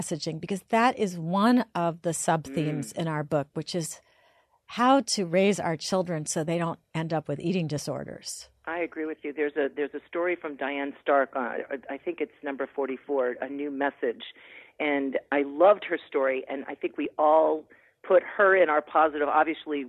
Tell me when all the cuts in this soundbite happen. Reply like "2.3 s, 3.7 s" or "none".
none

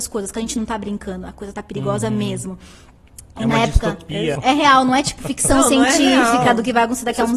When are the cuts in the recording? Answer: 4.4 s

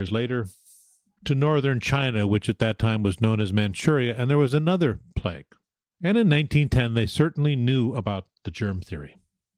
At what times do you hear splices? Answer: 5.9 s

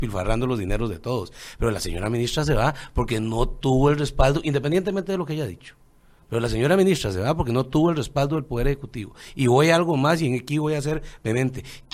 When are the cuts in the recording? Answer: none

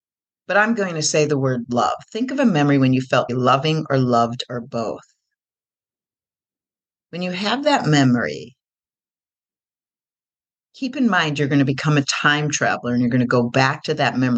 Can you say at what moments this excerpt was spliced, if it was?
3.3 s

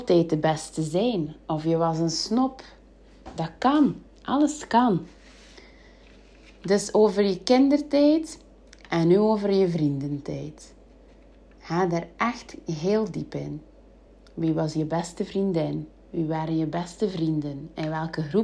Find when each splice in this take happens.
none

